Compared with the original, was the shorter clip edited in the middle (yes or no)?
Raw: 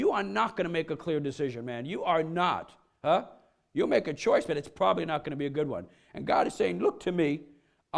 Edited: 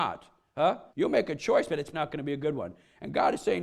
yes